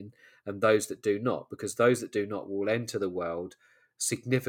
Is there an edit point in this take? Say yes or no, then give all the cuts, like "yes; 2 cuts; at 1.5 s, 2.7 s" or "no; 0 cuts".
no; 0 cuts